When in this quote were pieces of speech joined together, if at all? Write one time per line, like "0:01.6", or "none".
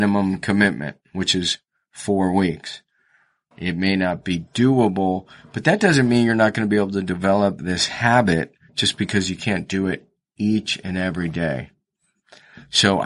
0:03.5

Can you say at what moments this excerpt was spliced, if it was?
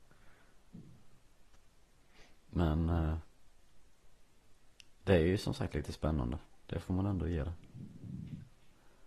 none

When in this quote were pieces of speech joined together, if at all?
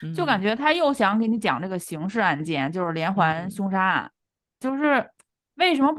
0:04.6

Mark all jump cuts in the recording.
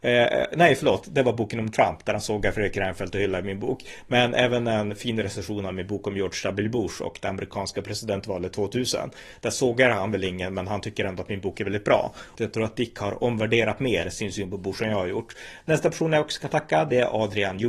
0:12.4
0:15.6

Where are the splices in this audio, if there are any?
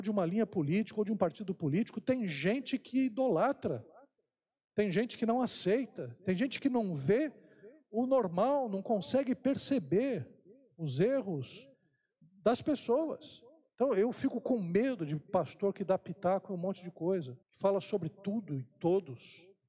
0:13.7
0:17.4

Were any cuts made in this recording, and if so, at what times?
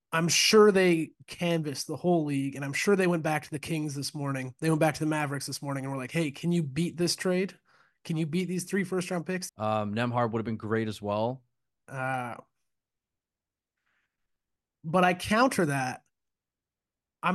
0:09.5
0:11.8

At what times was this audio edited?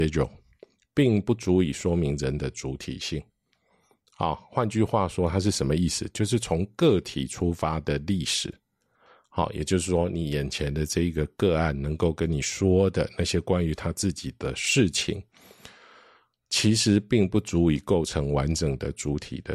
none

